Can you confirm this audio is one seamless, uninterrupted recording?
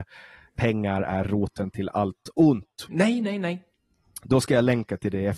no; 1 cut; at 2.9 s

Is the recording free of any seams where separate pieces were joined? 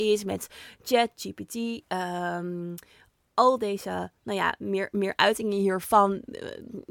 yes; 0 cuts

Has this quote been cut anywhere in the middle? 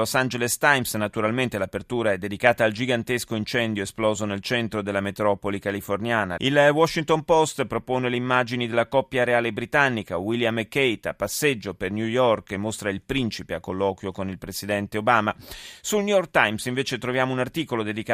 yes; 1 cut; at 6.4 s

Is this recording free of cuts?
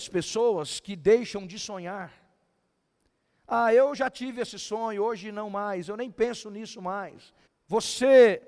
no; 1 cut; at 7.5 s

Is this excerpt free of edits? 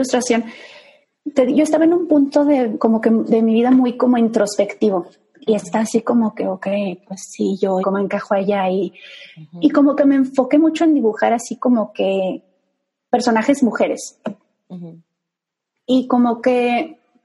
no; 1 cut; at 7.8 s

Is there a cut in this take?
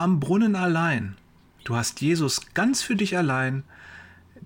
yes; 1 cut; at 1.6 s

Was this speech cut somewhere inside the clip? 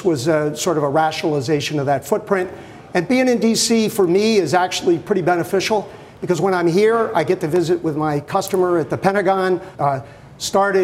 yes; 1 cut; at 9.7 s

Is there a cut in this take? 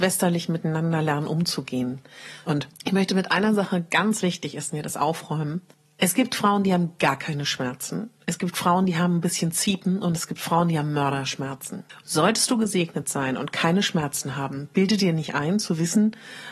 yes; 2 cuts; at 2.4 s, 12.0 s

